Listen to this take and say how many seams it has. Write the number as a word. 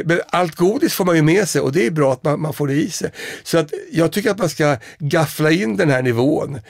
one